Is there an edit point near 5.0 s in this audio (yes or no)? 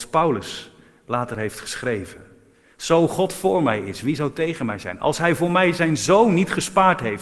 no